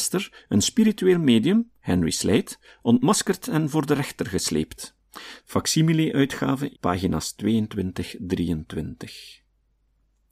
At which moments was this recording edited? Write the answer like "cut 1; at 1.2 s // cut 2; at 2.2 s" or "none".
cut 1; at 5.4 s // cut 2; at 6.7 s